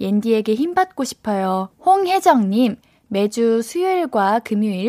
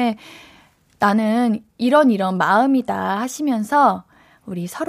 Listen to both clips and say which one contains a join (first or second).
first